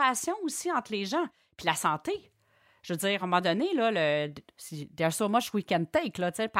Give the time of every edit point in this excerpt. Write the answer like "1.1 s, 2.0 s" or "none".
none